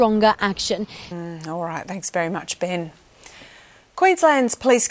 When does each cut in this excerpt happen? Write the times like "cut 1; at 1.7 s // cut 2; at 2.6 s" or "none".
cut 1; at 1.1 s